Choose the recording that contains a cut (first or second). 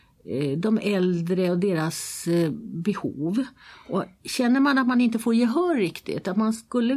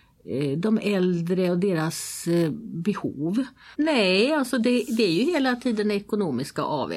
second